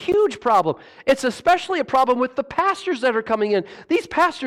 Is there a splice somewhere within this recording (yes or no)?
no